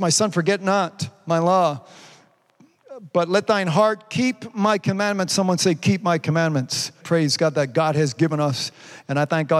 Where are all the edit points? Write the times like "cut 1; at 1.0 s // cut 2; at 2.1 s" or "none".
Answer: cut 1; at 7.0 s